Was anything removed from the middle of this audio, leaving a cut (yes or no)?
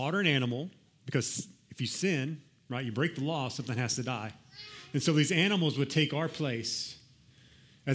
no